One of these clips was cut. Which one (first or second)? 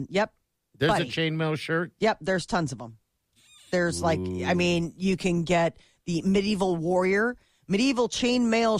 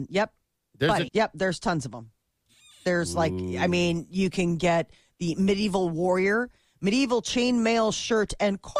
second